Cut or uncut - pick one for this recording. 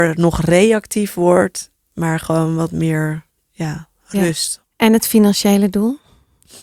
cut